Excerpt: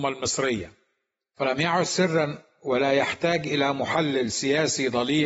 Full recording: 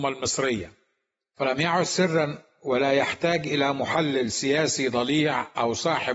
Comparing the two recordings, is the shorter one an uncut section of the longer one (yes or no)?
yes